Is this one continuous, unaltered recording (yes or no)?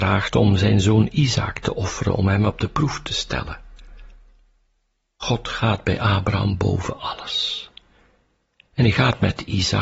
yes